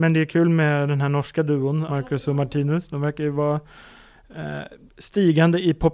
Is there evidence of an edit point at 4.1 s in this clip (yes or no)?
no